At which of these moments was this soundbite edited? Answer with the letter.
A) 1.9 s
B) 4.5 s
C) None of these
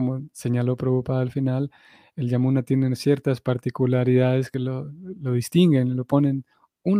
C